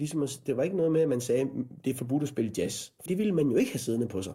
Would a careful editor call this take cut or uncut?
cut